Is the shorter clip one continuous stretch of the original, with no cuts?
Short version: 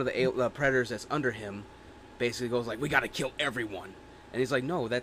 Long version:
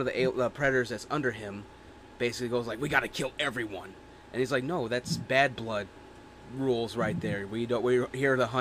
yes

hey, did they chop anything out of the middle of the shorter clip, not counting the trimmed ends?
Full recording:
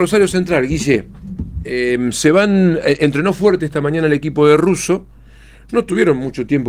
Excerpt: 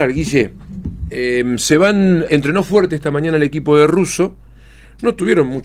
yes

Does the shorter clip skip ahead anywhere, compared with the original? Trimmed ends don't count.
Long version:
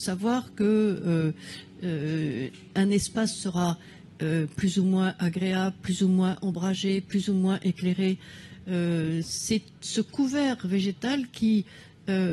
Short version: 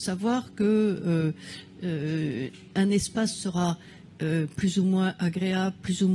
no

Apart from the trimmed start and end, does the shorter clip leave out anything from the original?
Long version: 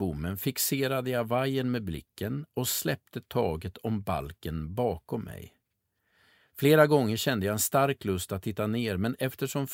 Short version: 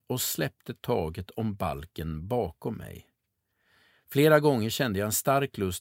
no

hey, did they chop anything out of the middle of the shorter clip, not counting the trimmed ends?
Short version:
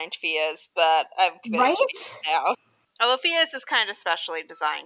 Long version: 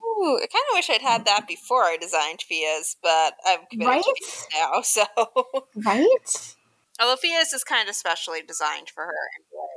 yes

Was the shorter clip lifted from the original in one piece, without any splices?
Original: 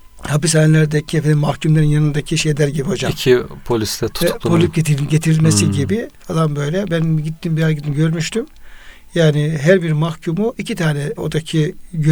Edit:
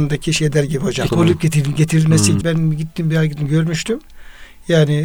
no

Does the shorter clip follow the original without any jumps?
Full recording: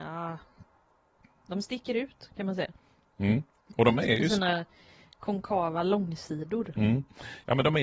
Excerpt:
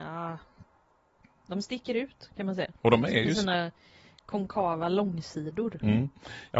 no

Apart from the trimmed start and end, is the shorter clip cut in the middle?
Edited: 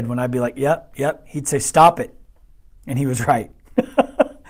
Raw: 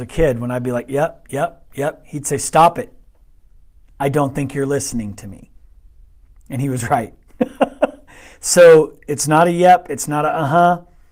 yes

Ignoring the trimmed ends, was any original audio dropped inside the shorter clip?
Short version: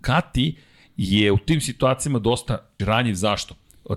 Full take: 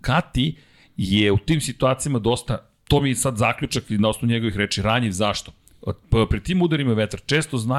yes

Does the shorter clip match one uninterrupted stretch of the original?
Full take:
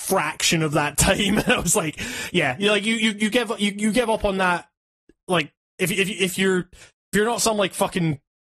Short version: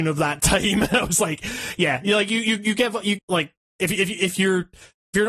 no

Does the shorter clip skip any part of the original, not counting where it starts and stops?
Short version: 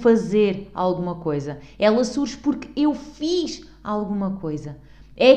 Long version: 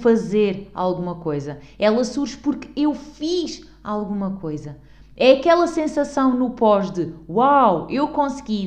no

